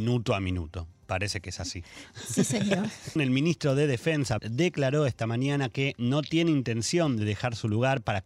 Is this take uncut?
no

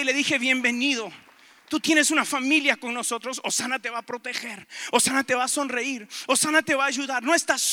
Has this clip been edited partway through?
no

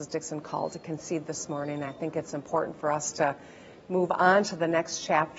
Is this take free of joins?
yes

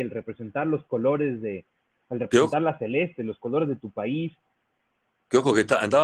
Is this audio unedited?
yes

